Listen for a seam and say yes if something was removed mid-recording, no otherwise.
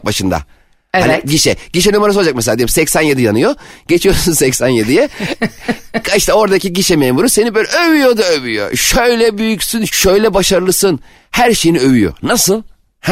yes